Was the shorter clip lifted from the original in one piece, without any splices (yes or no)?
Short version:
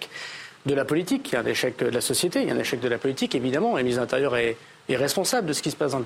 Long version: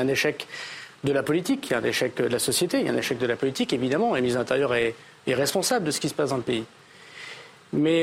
yes